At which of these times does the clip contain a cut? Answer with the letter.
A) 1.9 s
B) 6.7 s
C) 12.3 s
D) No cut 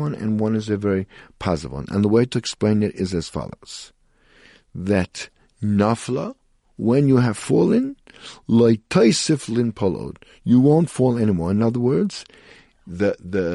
D